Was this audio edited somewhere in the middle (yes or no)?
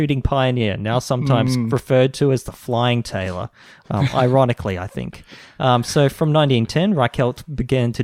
no